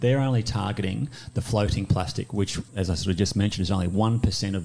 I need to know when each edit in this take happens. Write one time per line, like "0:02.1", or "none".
none